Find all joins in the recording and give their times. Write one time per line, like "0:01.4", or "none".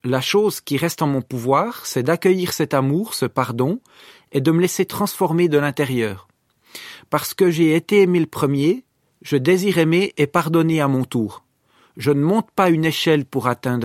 none